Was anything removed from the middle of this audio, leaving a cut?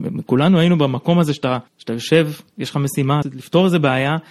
yes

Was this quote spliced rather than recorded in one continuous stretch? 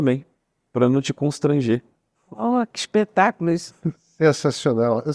yes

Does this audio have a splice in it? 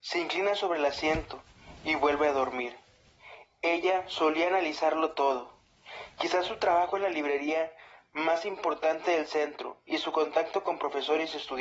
no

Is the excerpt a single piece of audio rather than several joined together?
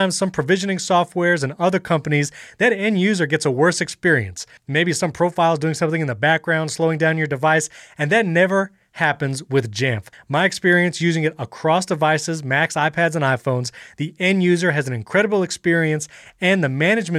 yes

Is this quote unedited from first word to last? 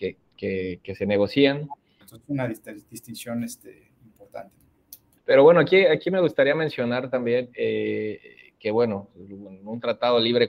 no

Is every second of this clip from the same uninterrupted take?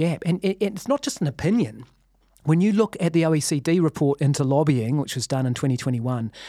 yes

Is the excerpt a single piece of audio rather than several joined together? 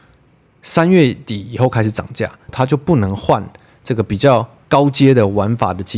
no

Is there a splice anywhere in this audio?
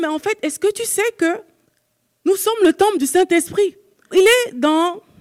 yes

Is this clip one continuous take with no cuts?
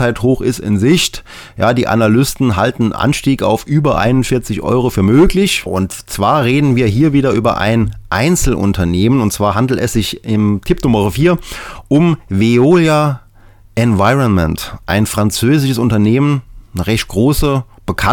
no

